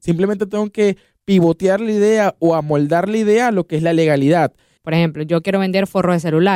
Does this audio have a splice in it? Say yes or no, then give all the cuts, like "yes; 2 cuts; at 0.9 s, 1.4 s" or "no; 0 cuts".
yes; 1 cut; at 4.8 s